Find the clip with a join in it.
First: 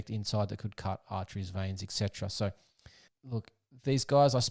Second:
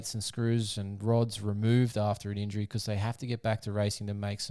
first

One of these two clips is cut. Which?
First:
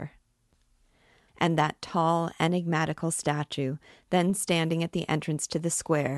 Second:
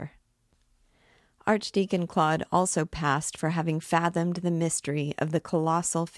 first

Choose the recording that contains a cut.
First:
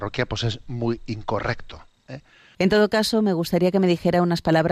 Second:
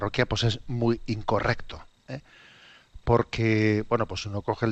first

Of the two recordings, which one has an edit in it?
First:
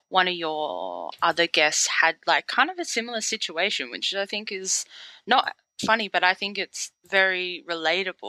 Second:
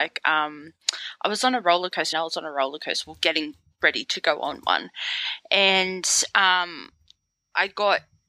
second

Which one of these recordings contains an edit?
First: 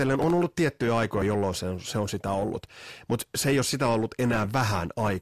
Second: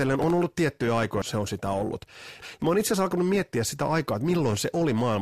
second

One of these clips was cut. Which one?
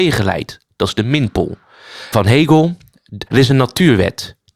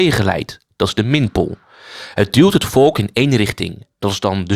first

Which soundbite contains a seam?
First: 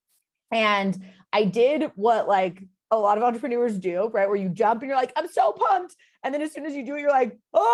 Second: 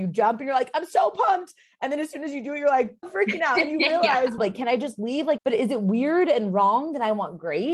second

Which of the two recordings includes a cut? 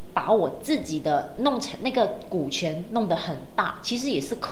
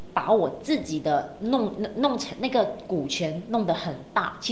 first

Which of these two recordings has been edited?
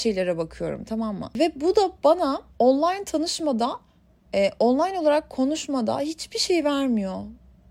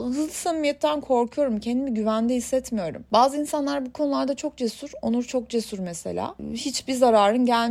first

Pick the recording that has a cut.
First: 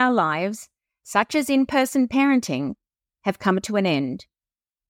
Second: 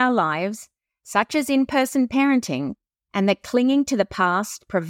second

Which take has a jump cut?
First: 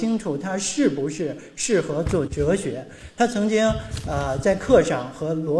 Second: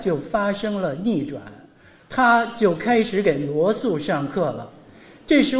first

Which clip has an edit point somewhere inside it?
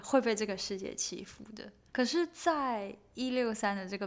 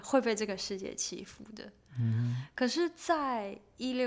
first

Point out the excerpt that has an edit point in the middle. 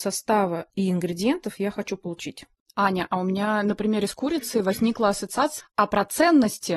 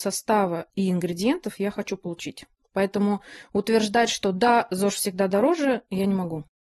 first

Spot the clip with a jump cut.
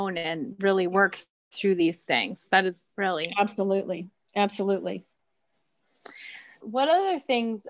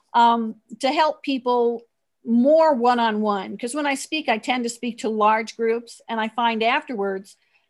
first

